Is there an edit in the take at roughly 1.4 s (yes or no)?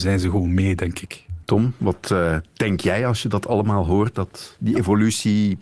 yes